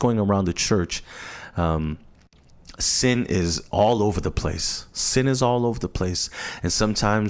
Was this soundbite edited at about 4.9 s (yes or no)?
no